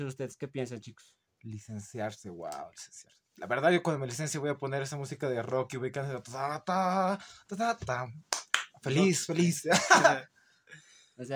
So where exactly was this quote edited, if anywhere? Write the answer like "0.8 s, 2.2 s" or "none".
none